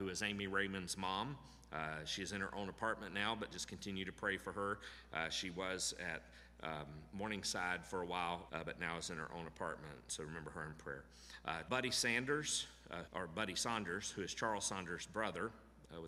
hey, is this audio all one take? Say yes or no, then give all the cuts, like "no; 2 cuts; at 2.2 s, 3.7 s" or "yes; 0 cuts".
no; 3 cuts; at 8.5 s, 11.7 s, 13.1 s